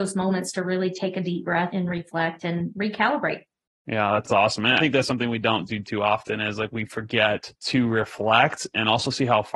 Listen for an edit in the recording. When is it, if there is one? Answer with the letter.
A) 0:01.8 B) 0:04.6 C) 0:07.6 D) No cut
C